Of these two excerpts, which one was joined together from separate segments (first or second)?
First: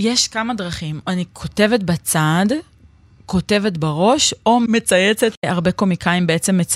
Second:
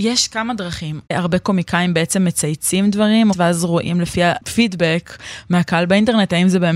second